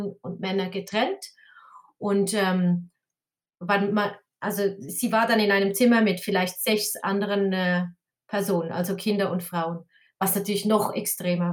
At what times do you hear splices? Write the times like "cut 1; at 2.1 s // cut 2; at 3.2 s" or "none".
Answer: none

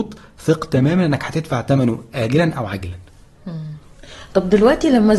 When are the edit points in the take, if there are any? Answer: none

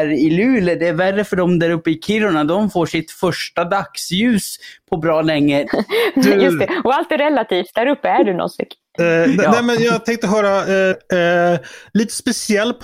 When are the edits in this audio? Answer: cut 1; at 5.7 s // cut 2; at 10.9 s

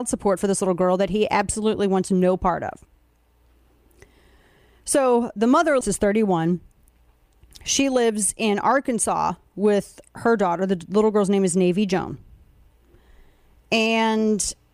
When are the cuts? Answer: cut 1; at 5.8 s

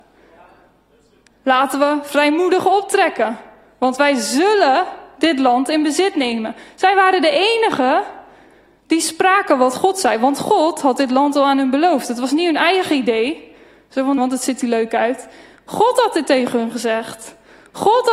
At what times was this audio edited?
cut 1; at 14.2 s

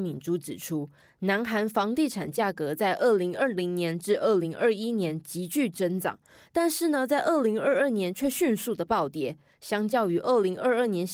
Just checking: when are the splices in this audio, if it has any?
none

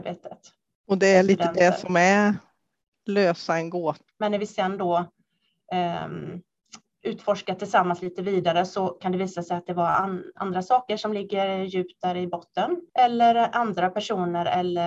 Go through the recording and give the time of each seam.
cut 1; at 4.1 s // cut 2; at 12.9 s

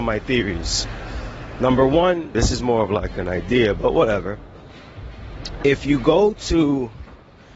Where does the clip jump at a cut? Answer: cut 1; at 2.3 s

